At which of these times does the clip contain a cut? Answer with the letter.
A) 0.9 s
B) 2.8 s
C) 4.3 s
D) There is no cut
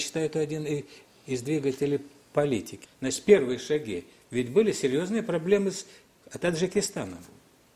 B